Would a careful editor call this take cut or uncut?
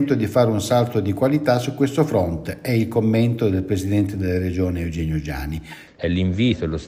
cut